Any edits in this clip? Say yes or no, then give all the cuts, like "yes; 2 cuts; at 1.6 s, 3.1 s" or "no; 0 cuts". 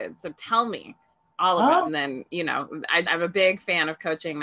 yes; 2 cuts; at 1.9 s, 3.0 s